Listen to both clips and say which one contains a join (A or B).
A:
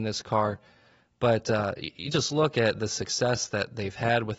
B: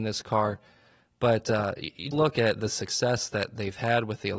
B